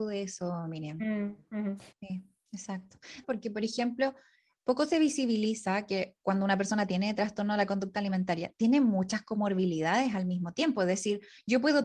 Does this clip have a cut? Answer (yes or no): yes